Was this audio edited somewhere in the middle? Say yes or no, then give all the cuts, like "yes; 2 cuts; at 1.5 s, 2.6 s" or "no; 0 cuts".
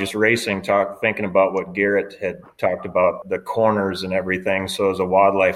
yes; 1 cut; at 3.2 s